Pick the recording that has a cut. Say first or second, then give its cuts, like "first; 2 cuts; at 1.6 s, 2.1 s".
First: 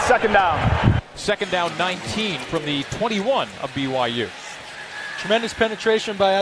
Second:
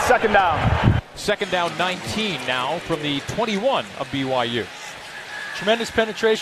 first; 1 cut; at 2.4 s